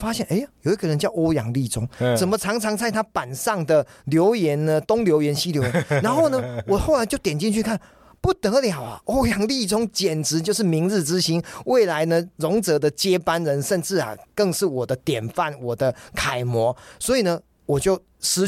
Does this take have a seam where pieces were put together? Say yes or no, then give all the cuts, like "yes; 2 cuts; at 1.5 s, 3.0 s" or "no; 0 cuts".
no; 0 cuts